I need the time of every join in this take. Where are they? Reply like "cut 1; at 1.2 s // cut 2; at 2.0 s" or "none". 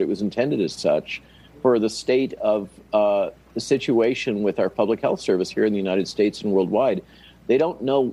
none